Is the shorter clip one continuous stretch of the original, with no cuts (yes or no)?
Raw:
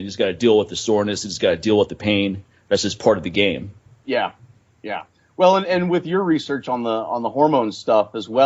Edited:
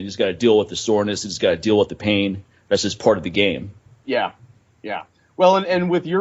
yes